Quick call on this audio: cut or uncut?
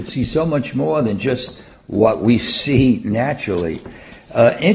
uncut